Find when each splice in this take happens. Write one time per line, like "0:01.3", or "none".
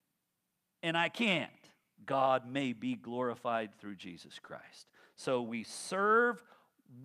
0:02.0